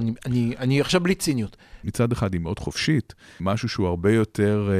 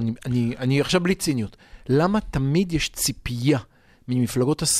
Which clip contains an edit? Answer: first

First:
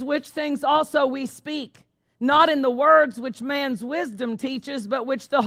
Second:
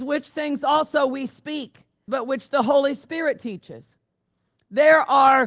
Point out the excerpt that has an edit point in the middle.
second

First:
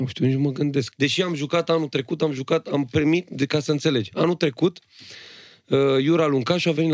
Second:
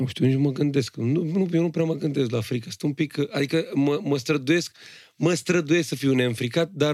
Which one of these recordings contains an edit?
first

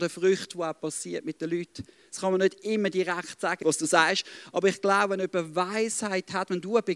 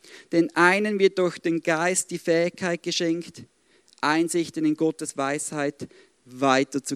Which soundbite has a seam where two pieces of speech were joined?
first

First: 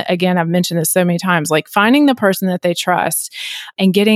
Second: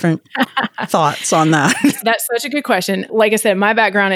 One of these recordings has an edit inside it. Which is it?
second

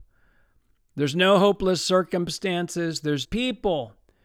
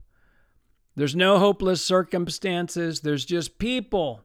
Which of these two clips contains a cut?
first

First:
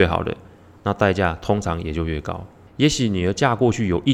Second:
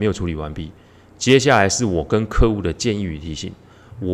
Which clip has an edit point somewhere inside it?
first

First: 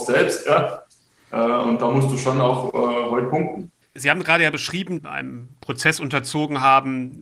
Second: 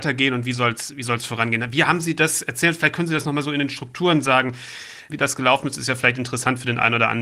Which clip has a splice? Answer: first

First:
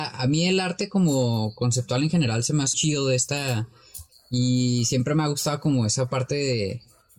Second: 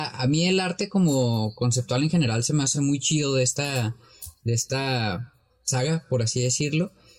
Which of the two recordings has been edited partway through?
first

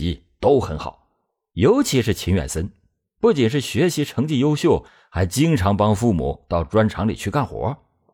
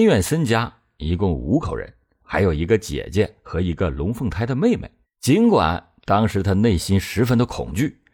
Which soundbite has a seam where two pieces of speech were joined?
second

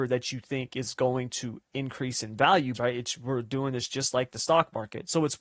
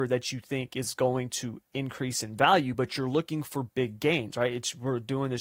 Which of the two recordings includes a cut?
first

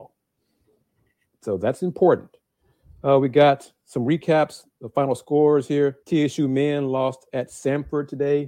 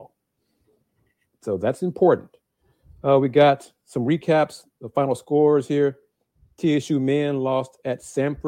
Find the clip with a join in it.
first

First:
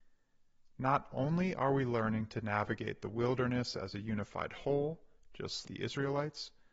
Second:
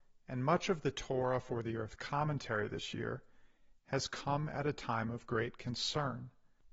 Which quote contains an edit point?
first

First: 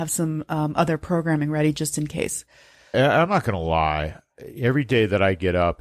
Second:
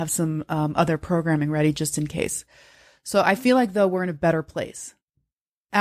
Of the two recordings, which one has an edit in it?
first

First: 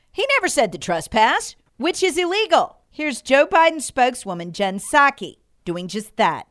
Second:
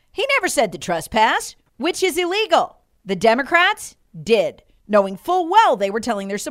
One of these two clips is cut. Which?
first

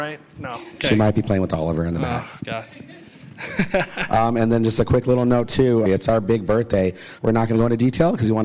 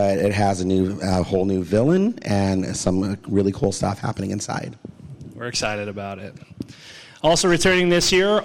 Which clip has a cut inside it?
first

